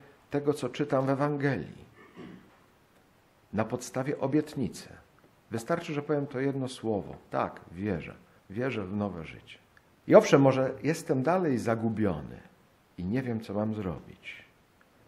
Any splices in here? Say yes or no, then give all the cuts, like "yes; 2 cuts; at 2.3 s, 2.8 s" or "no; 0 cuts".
yes; 1 cut; at 9.9 s